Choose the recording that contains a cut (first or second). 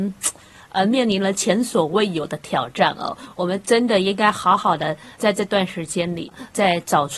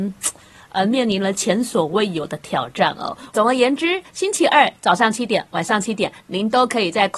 second